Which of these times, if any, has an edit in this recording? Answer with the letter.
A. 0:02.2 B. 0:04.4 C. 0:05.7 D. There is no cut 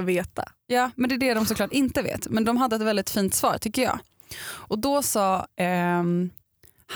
D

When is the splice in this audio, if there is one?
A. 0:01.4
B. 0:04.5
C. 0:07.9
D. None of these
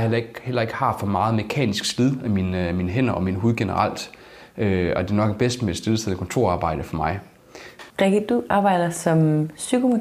C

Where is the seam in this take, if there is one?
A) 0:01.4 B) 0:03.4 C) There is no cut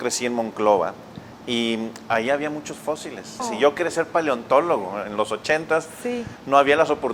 B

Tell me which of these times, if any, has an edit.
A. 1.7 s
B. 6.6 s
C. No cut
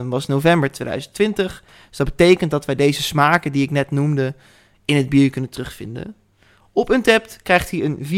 C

